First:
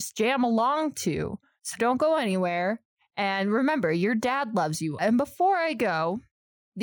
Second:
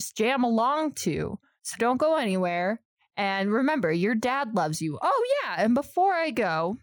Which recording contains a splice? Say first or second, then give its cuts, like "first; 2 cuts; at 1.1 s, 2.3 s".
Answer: first; 1 cut; at 5.0 s